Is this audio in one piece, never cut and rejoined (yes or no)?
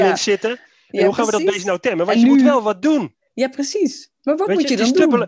yes